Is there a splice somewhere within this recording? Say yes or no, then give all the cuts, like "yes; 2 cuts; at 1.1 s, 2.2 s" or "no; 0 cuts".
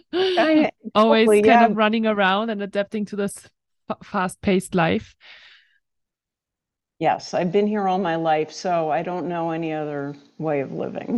no; 0 cuts